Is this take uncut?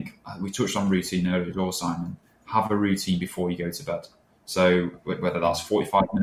yes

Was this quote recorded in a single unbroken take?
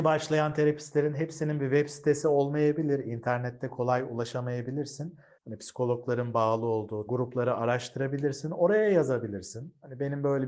no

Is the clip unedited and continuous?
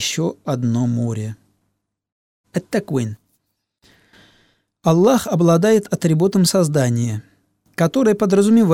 no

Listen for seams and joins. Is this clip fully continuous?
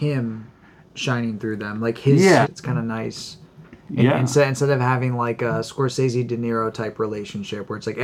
no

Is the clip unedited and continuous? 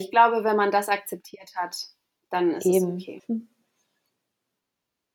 no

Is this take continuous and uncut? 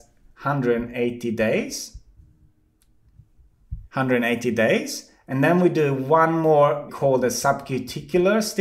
no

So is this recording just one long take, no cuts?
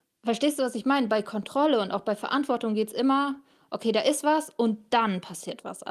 yes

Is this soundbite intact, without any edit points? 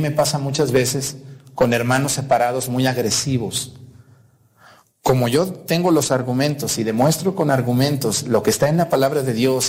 yes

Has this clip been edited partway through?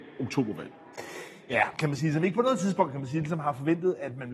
yes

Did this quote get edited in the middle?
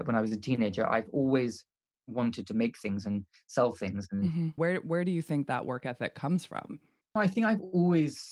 yes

